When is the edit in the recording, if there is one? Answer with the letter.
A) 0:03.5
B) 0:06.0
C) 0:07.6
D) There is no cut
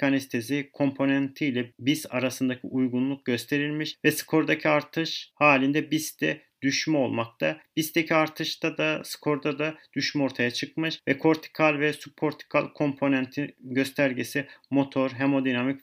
D